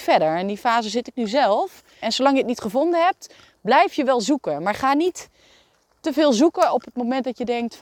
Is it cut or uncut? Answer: cut